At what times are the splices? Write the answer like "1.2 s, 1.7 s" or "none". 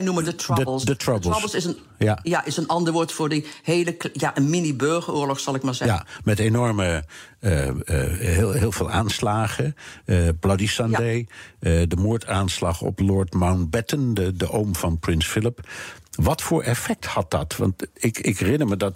none